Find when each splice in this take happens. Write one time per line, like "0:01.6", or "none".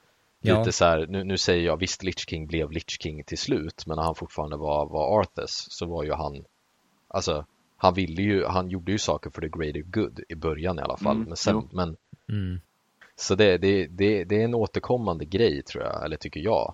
0:11.7